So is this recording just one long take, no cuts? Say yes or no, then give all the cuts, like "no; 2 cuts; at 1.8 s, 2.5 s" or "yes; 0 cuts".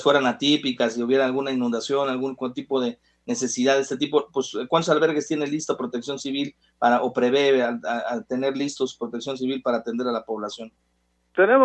yes; 0 cuts